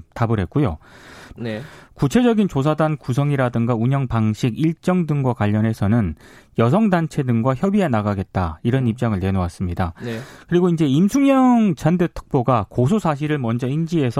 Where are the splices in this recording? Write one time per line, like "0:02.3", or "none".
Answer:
0:01.4